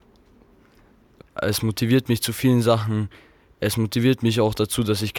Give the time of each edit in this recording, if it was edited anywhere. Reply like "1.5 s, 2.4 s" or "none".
1.2 s